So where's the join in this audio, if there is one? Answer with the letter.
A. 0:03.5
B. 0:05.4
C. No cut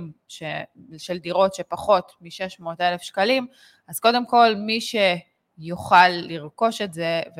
C